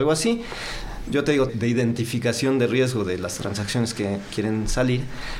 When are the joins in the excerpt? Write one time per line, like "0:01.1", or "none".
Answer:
0:01.5